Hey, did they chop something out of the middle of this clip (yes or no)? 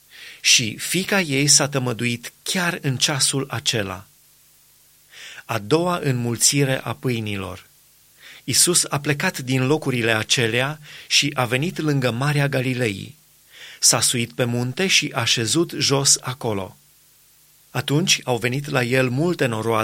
no